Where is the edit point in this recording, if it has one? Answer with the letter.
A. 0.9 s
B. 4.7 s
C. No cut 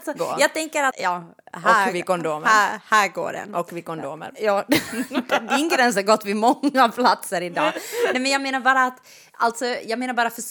A